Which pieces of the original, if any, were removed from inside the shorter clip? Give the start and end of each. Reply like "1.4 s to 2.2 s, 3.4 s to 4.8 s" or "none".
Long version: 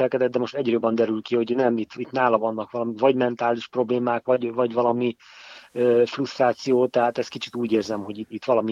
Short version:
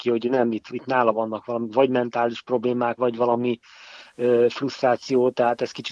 4.2 s to 4.5 s